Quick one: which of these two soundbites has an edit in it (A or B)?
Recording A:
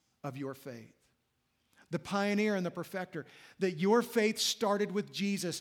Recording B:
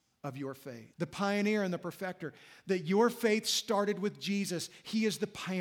B